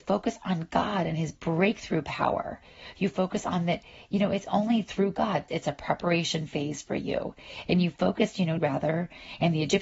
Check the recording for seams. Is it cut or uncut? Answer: cut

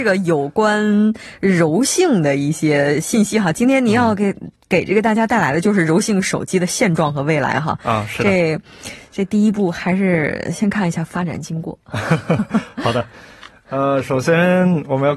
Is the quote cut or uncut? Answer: uncut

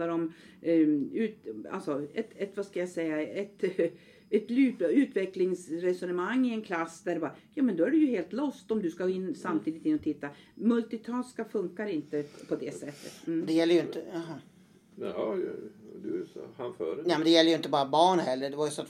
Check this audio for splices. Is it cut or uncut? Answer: uncut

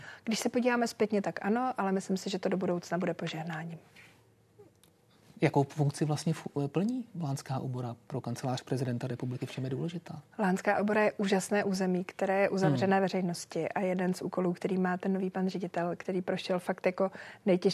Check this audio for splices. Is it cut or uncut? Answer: uncut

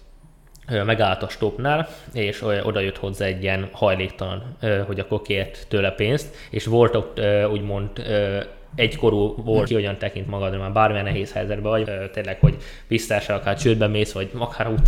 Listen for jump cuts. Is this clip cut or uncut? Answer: cut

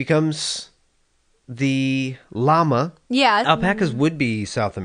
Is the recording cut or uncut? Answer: cut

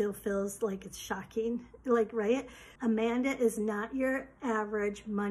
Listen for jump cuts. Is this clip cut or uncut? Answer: cut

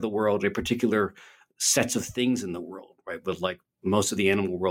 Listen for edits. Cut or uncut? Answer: uncut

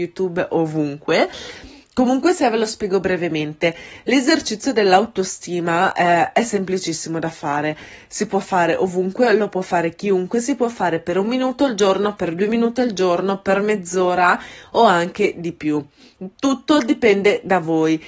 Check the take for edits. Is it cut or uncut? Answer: uncut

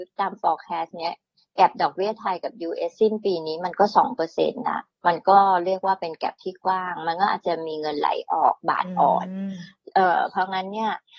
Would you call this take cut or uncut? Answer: uncut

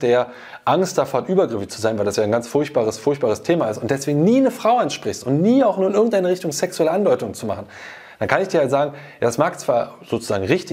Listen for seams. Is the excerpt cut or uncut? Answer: uncut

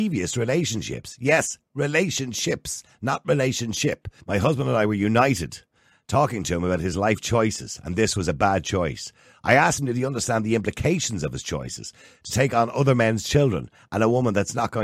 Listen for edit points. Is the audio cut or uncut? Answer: cut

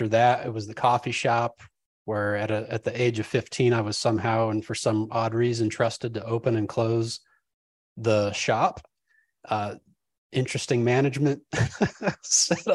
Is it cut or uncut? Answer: uncut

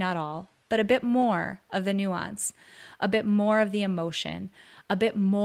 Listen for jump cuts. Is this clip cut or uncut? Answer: uncut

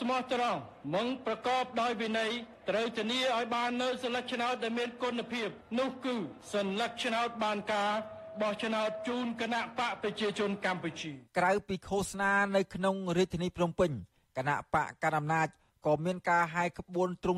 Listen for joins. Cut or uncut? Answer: uncut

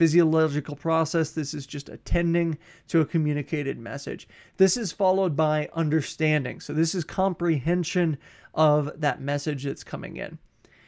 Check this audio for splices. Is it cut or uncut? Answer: uncut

